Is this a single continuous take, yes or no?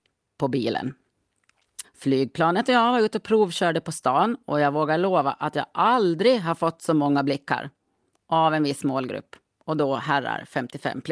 no